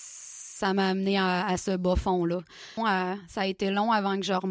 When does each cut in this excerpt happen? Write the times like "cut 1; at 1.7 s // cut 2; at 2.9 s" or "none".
cut 1; at 2.8 s